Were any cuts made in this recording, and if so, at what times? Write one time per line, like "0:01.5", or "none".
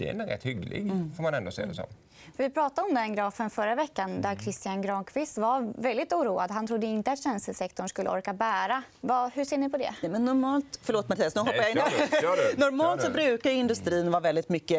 0:08.9